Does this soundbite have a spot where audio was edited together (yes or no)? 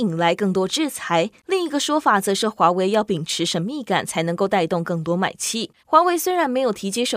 yes